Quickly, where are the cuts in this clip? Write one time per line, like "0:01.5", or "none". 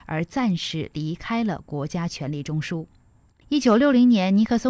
0:03.4